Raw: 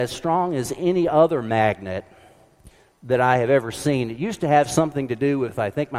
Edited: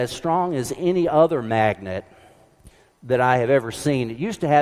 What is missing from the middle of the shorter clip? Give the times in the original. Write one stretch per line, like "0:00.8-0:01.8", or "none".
none